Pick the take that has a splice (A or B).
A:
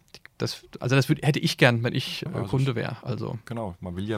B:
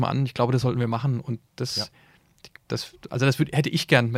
A